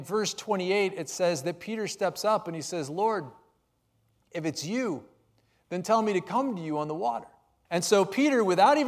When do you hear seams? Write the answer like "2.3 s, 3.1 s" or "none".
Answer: 7.7 s